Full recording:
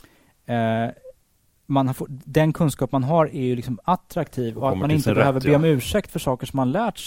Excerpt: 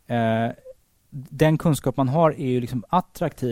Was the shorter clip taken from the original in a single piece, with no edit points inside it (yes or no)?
no